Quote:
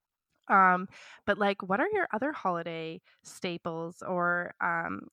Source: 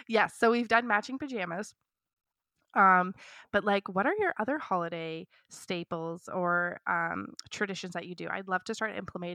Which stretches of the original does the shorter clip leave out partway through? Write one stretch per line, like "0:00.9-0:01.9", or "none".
none